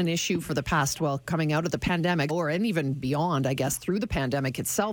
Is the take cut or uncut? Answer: cut